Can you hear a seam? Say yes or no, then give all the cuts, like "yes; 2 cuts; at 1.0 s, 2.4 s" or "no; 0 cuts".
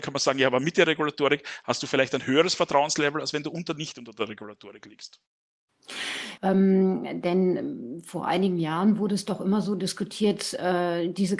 yes; 1 cut; at 6.4 s